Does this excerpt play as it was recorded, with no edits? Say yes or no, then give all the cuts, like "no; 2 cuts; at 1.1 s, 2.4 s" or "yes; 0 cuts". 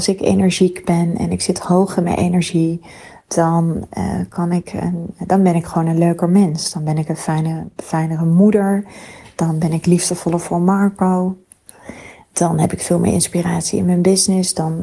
yes; 0 cuts